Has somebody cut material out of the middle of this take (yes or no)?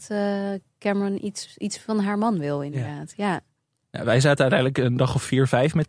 no